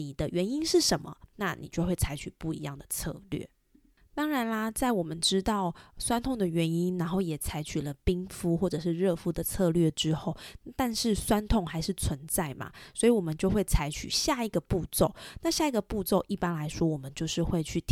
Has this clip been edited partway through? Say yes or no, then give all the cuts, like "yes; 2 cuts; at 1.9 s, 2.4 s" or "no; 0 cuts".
no; 0 cuts